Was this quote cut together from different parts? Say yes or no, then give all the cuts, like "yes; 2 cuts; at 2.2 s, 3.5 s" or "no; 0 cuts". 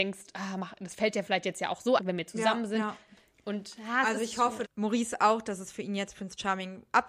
yes; 2 cuts; at 2.0 s, 4.6 s